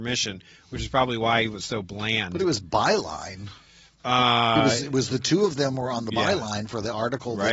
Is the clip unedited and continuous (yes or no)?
yes